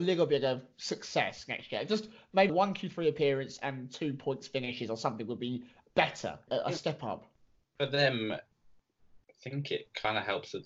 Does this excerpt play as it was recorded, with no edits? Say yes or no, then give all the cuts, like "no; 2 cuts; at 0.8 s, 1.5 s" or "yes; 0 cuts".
no; 2 cuts; at 2.5 s, 6.5 s